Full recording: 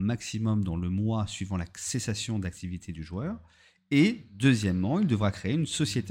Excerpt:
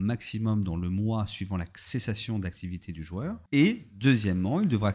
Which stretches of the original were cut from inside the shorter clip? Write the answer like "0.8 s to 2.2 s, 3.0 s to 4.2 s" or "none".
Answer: 3.5 s to 3.8 s

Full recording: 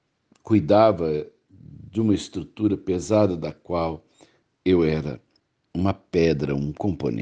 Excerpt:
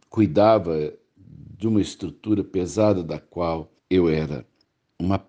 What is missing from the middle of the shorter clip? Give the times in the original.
4.1 s to 4.5 s

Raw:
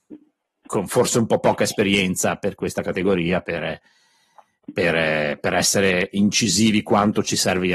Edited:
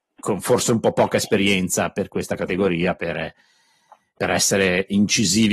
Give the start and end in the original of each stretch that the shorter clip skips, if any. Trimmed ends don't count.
4.6 s to 5.4 s

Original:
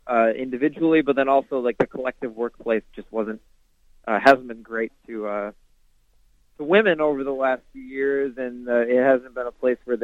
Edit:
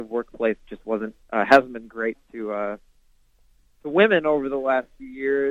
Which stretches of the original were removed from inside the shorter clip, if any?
3.5 s to 4.0 s

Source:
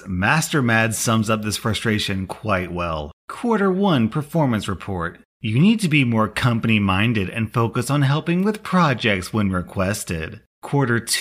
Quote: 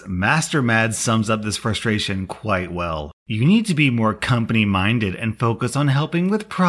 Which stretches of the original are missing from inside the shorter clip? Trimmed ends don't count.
3.2 s to 5.3 s

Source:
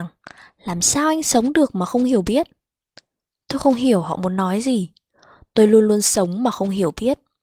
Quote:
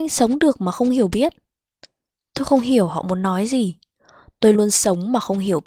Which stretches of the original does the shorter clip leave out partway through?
5.7 s to 5.9 s

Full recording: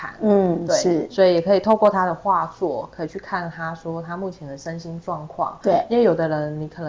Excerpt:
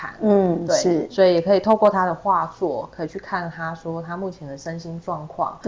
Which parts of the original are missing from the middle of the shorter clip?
none

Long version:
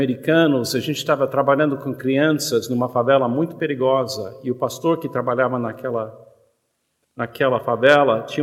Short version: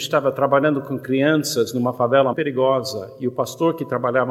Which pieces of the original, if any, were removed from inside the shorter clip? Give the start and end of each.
3.3 s to 3.6 s

